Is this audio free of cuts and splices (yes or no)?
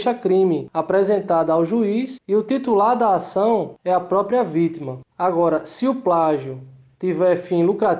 no